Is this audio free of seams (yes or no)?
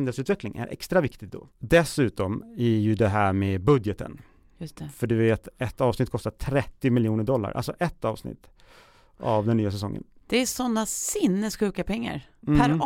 yes